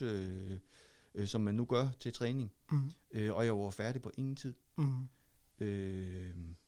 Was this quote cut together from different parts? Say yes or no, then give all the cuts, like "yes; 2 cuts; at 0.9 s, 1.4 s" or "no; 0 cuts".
no; 0 cuts